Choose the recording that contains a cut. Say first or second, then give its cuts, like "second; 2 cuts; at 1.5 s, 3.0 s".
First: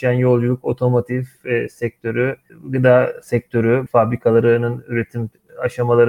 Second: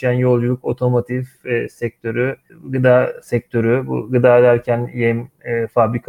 first; 1 cut; at 3.9 s